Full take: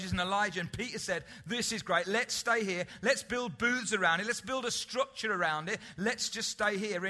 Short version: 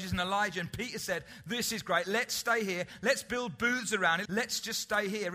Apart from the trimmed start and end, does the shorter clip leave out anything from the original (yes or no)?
yes